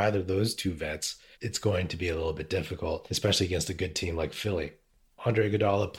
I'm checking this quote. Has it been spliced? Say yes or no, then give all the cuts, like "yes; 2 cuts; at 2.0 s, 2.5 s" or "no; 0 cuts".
yes; 1 cut; at 1.3 s